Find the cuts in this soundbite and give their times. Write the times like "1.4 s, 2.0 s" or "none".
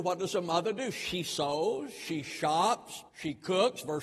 3.1 s